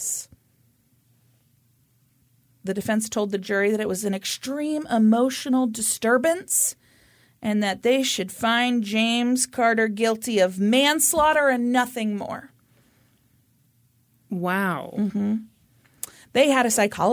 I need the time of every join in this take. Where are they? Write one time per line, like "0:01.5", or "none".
0:02.6